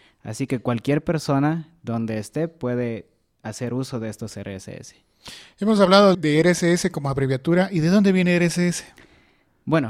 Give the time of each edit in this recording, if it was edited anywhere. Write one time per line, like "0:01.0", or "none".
0:06.1

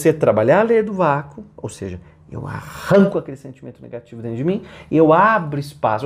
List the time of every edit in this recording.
none

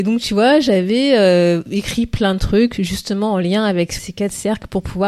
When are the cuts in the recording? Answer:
0:04.0

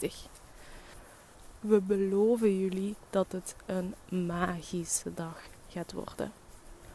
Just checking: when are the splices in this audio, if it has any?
none

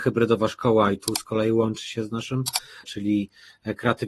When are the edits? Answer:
0:02.8

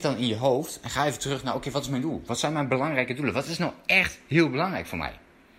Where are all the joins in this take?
0:02.3

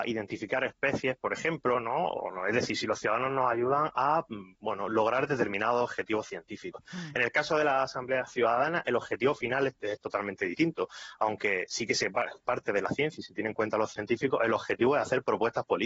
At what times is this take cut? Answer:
none

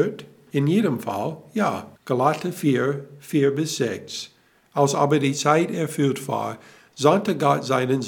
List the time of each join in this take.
0:02.0

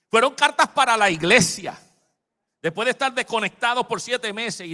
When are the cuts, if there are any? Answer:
0:02.5

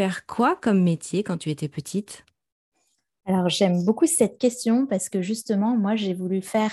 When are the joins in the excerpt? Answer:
none

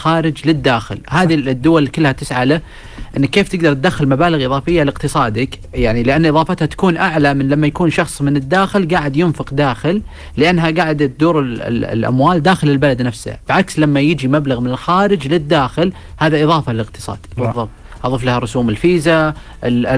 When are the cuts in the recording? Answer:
0:17.4

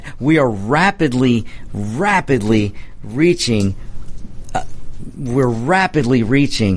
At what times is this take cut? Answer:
none

